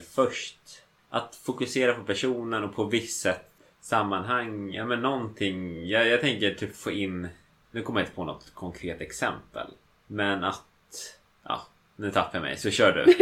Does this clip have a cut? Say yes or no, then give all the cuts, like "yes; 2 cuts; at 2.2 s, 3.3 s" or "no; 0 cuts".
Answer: no; 0 cuts